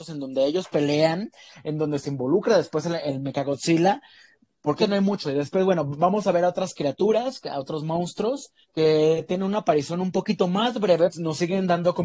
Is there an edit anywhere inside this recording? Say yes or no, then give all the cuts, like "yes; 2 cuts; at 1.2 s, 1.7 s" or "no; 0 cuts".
yes; 3 cuts; at 4.8 s, 8.6 s, 11.1 s